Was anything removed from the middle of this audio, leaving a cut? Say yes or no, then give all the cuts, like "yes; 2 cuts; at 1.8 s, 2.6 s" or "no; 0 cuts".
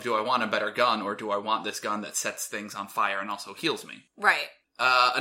no; 0 cuts